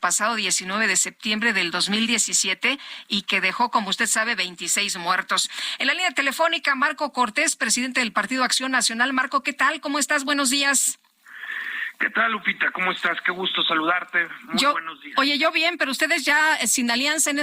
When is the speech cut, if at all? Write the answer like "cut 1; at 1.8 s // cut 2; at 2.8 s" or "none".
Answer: none